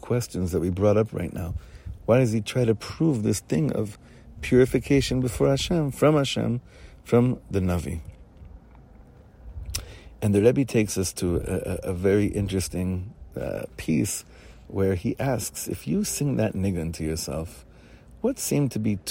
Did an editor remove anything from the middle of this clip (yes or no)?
yes